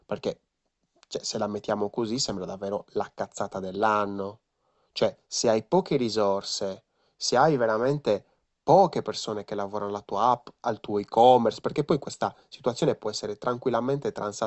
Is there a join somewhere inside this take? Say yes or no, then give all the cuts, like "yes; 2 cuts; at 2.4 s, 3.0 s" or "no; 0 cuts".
no; 0 cuts